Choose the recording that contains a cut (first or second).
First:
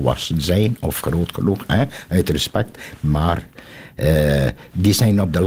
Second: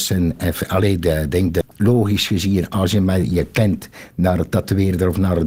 second